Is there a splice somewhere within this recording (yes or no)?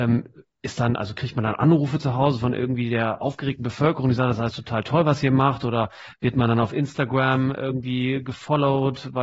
no